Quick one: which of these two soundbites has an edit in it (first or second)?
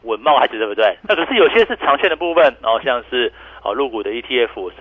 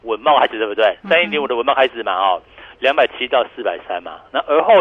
first